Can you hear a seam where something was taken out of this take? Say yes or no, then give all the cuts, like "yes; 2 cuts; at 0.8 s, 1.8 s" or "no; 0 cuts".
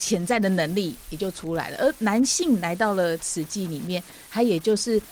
no; 0 cuts